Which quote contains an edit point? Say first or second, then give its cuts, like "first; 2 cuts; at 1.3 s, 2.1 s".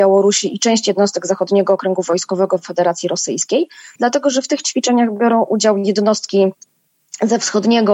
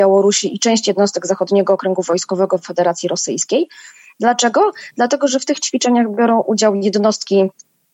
first; 1 cut; at 4.0 s